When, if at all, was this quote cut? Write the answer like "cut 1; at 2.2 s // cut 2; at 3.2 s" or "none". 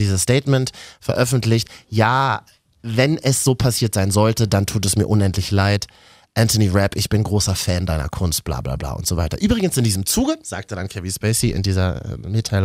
none

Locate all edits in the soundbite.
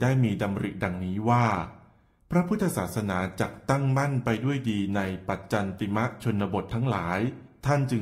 none

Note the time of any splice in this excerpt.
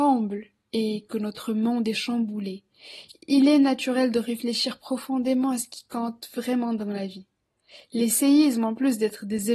none

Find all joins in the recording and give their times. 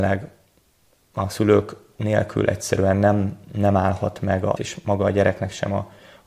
cut 1; at 4.6 s

